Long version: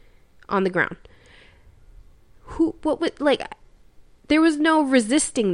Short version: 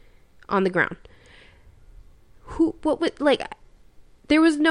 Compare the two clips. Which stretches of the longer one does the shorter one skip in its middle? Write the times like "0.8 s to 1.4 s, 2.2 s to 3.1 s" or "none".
none